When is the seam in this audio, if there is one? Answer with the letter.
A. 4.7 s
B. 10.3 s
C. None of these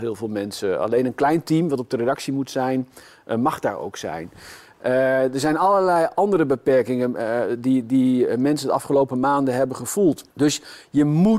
B